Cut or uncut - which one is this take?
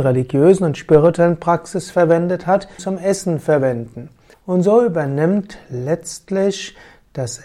cut